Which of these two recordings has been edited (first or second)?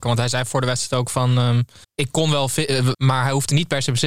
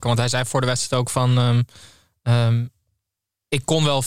first